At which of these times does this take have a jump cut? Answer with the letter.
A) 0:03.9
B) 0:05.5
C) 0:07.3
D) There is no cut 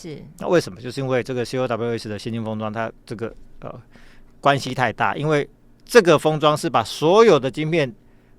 D